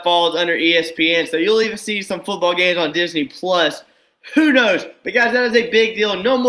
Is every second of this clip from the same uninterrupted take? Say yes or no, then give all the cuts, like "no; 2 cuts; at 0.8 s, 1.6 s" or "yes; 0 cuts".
yes; 0 cuts